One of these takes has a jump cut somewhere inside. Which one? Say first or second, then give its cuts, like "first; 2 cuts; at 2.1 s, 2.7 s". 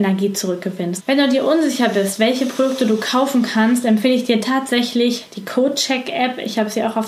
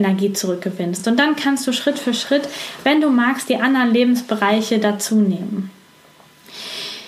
first; 1 cut; at 1.0 s